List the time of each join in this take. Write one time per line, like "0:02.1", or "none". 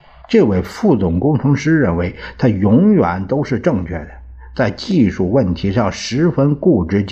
none